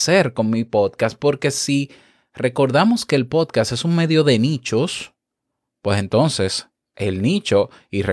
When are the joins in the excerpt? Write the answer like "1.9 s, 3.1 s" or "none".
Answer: none